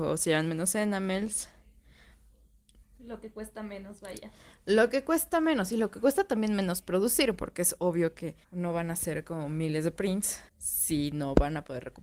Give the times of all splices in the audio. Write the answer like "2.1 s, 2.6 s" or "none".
2.8 s, 8.4 s, 10.5 s